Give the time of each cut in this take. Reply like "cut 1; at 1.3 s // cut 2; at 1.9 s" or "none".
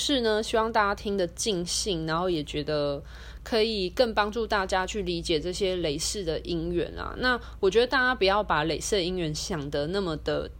none